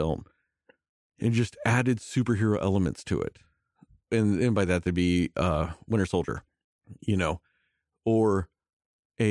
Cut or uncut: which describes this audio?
uncut